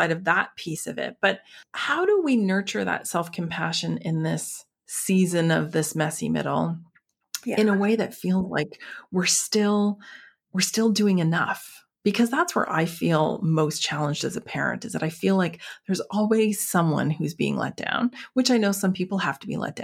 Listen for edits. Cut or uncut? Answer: uncut